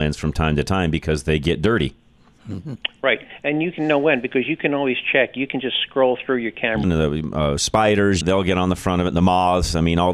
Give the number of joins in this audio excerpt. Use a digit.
2